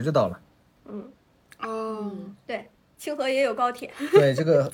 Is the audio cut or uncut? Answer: uncut